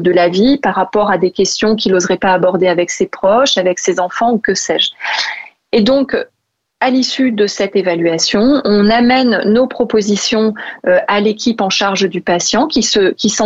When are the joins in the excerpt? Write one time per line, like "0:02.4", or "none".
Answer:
none